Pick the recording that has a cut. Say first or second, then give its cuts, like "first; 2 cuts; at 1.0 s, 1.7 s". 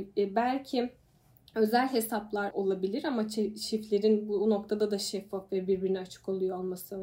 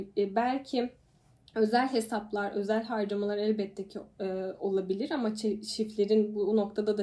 first; 1 cut; at 2.5 s